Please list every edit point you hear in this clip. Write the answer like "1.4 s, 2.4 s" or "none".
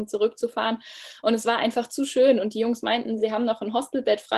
none